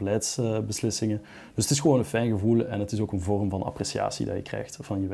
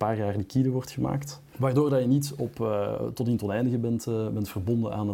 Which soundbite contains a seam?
second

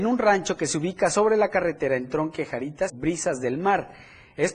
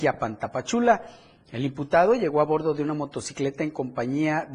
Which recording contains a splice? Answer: first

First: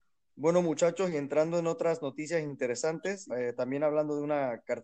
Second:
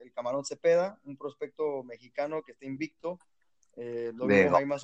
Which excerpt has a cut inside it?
first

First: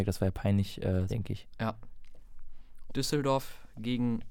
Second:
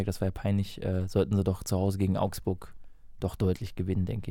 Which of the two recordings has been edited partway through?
first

